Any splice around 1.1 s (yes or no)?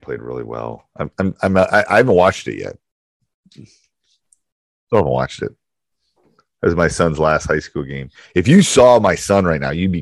no